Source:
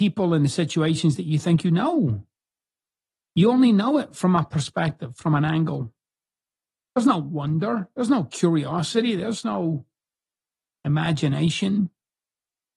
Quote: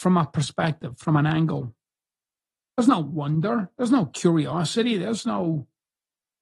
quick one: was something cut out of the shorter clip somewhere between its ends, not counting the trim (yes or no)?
no